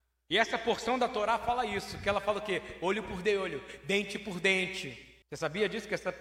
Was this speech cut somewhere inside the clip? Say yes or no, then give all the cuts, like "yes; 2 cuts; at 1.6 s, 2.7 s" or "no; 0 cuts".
yes; 1 cut; at 5.2 s